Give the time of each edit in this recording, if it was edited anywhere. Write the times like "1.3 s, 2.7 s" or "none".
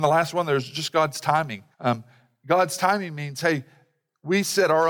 1.7 s